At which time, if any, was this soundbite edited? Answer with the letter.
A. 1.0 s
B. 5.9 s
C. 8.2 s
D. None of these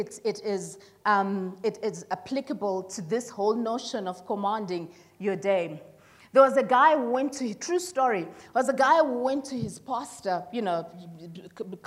D